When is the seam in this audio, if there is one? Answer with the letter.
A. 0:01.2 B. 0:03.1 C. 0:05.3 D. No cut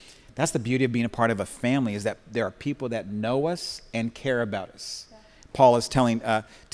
D